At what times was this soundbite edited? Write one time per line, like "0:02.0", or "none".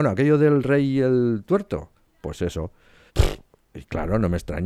0:03.1